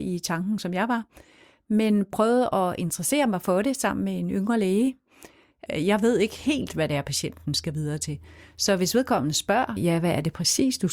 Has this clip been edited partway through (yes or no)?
yes